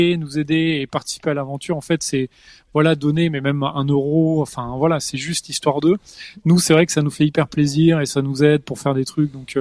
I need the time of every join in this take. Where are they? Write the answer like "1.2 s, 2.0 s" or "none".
none

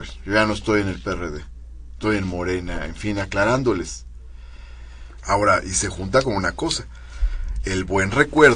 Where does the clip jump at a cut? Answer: 5.2 s, 7.6 s

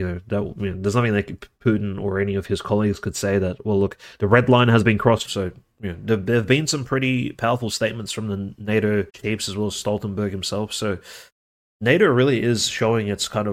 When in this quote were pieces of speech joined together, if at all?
5.3 s, 9.1 s

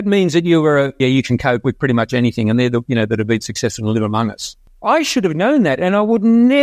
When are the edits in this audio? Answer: 1.0 s, 2.9 s

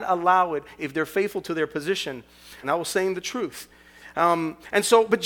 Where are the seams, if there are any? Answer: 2.6 s

